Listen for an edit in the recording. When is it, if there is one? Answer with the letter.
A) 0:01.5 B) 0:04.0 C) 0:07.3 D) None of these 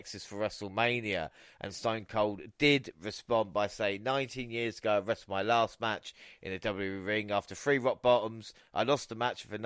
D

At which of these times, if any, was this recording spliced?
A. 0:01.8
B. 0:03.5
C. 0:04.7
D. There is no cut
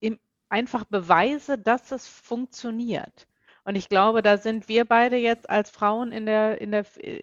D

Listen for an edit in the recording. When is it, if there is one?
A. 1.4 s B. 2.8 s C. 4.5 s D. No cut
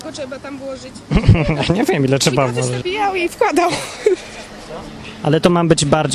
B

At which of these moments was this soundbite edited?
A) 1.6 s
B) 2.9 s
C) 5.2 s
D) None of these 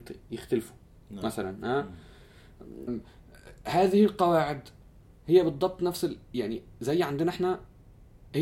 B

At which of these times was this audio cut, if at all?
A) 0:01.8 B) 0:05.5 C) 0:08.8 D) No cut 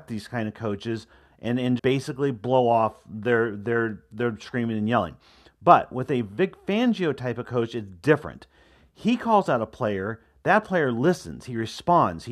A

